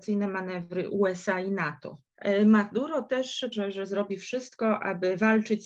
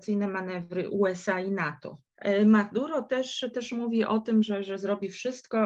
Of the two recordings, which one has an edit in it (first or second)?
first